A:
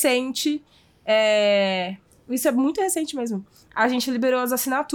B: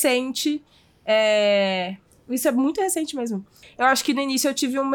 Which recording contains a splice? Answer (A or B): B